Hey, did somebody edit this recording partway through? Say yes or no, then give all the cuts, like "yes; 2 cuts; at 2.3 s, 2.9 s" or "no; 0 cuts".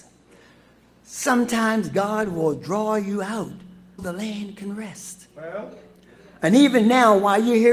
yes; 1 cut; at 4.0 s